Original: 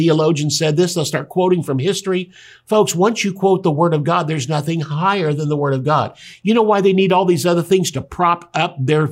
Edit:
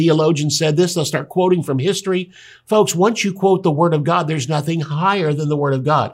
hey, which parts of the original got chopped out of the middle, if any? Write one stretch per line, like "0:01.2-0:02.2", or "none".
none